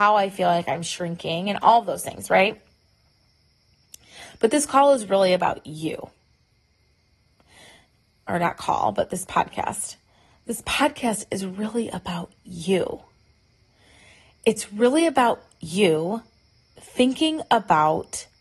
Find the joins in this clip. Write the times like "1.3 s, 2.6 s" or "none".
none

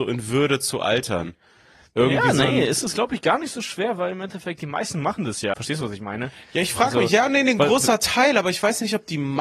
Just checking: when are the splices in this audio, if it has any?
5.5 s

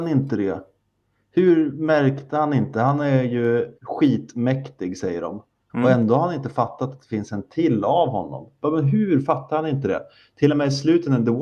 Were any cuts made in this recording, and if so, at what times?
3.8 s, 5.7 s

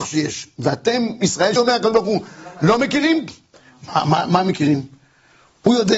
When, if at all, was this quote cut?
1.6 s

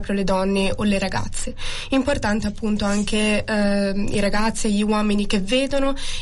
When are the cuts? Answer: none

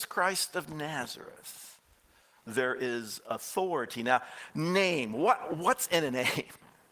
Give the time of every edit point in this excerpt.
none

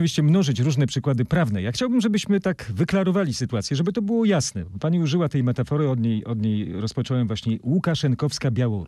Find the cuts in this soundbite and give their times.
none

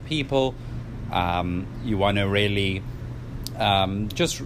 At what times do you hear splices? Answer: none

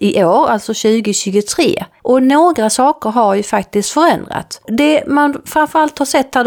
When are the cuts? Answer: none

